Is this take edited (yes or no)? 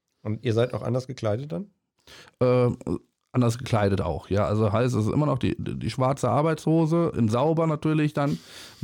no